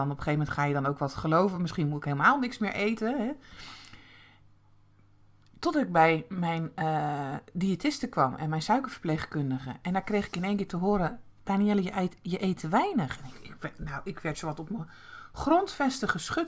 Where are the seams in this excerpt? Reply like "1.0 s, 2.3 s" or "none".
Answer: none